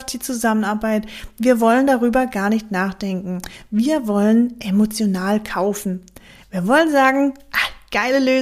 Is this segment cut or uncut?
uncut